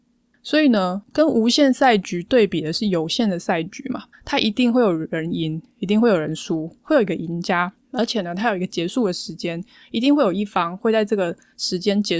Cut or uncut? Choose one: cut